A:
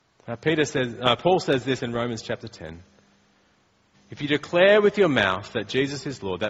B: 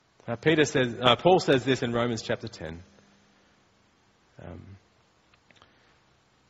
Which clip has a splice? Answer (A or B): A